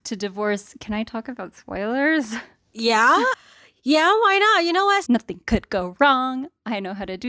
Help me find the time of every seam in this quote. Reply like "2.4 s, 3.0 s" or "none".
3.3 s, 5.1 s